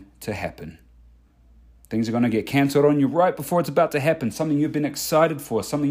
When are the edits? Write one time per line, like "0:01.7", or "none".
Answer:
0:01.8